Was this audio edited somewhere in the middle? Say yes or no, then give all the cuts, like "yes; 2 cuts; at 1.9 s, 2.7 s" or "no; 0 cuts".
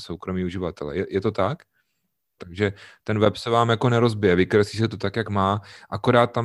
yes; 1 cut; at 2.4 s